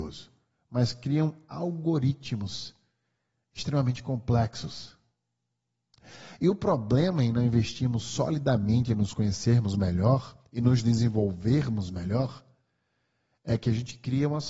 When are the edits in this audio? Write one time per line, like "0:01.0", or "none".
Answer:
none